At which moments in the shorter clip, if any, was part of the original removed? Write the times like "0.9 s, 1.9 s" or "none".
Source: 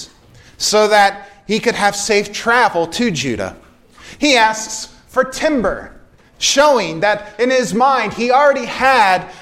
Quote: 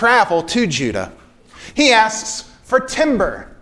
none